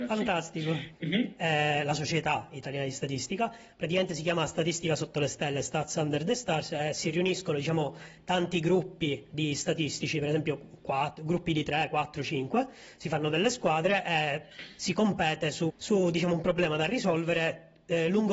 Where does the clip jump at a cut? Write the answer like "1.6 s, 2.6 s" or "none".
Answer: 0.9 s, 15.7 s

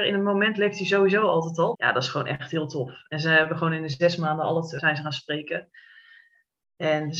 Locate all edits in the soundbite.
1.7 s, 4.8 s

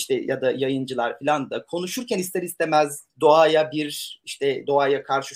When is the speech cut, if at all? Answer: none

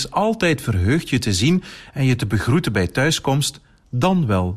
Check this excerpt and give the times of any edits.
none

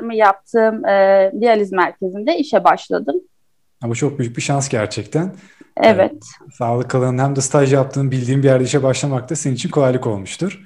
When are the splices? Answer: none

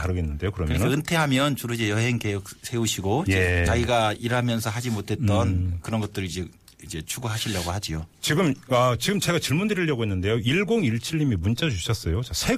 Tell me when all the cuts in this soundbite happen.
none

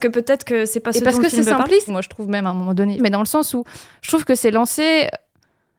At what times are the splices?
1.9 s, 3.0 s

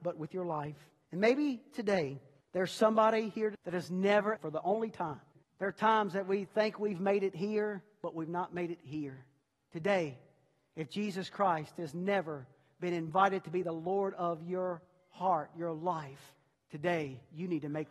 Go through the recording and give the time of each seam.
4.4 s, 9.6 s

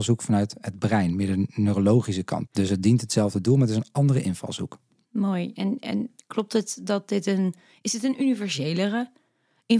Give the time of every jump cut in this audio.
2.5 s

